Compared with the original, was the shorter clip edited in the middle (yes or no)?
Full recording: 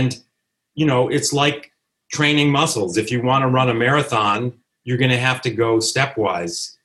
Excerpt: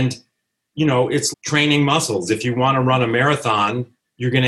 yes